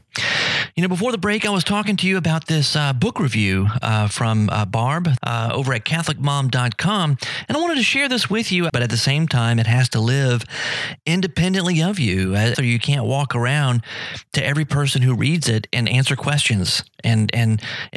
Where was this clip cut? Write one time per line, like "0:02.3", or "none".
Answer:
0:05.2
0:08.7
0:12.5